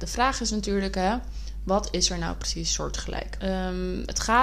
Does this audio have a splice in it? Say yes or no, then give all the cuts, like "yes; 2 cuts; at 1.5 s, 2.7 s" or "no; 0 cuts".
yes; 1 cut; at 3.4 s